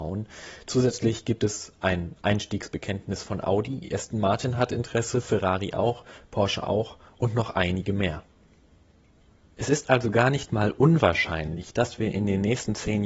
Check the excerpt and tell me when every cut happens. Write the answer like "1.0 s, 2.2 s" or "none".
none